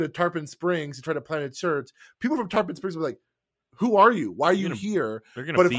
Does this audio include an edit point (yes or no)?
no